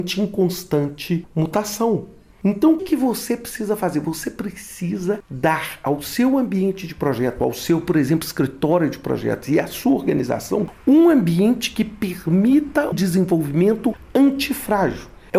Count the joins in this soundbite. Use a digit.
2